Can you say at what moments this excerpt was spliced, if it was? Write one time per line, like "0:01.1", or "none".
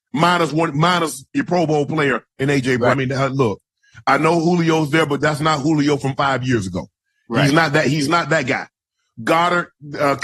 0:02.9